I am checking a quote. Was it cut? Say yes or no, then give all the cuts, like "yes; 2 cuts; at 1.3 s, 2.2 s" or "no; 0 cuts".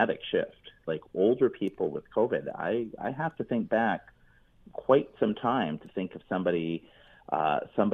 no; 0 cuts